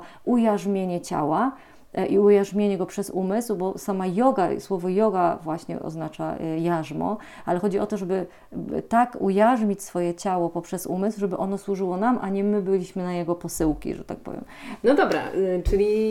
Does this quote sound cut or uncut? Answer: uncut